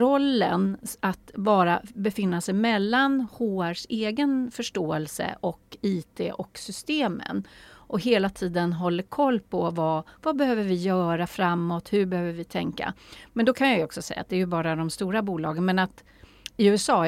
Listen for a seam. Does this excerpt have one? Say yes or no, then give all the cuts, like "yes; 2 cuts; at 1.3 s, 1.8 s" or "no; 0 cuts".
no; 0 cuts